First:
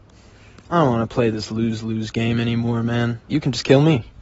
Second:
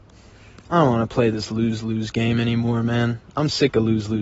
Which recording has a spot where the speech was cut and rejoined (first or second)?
first